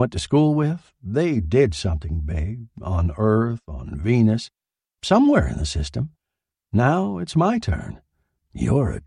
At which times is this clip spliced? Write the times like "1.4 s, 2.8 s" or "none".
none